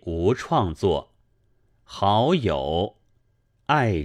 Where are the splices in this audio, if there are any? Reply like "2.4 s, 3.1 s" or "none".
1.7 s